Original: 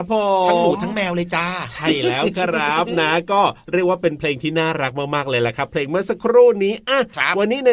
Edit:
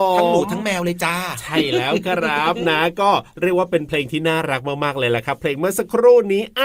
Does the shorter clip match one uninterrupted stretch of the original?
yes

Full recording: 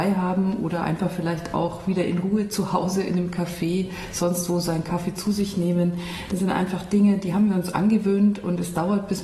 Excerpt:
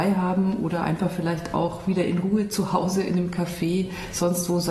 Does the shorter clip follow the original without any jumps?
yes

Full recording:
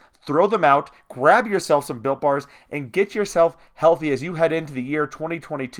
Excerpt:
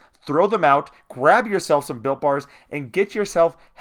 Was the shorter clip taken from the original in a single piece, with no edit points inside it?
yes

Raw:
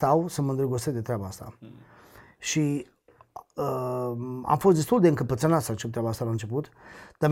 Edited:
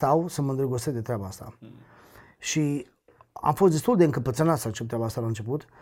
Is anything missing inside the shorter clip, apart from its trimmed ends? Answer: yes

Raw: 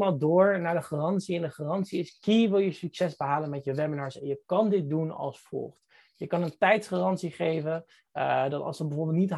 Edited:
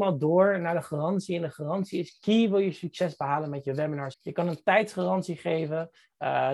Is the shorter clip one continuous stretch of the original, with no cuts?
no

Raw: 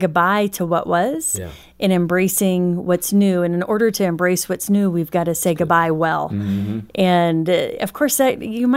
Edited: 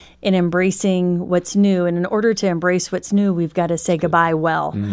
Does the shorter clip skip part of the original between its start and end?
no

